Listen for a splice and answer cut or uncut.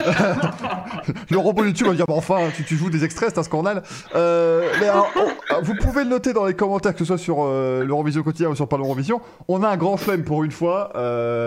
uncut